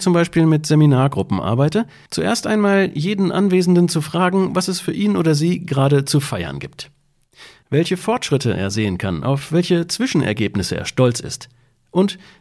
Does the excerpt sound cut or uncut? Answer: uncut